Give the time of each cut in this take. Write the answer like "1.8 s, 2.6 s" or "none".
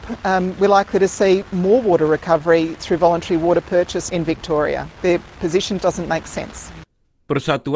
4.1 s, 5.8 s